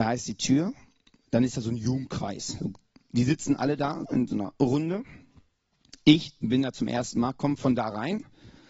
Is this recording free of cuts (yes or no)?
no